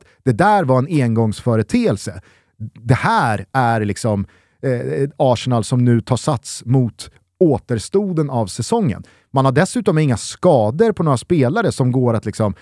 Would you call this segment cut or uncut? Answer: uncut